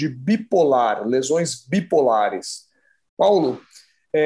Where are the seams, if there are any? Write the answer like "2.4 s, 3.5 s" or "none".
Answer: 3.1 s